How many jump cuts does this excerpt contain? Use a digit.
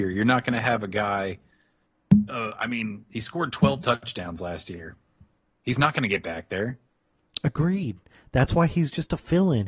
1